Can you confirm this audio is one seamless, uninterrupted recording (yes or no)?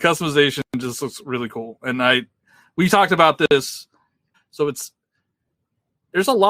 no